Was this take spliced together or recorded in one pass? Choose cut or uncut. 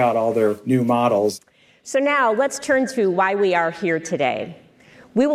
uncut